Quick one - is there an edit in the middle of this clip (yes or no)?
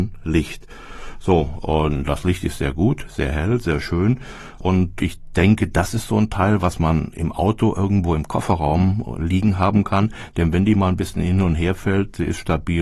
no